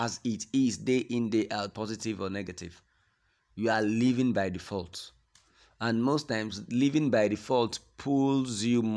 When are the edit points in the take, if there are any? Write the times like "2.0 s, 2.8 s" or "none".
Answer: 1.7 s